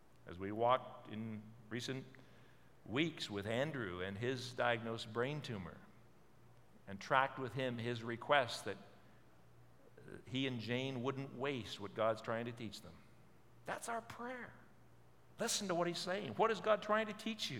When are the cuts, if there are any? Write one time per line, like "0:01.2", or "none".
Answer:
0:15.4